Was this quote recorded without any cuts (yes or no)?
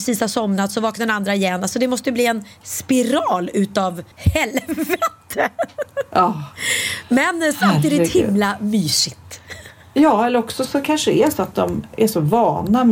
no